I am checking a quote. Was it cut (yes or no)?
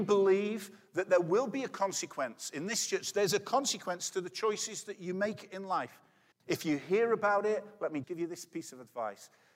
yes